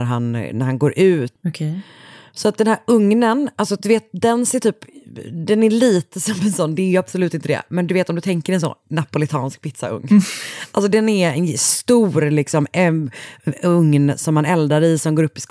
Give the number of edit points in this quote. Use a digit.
1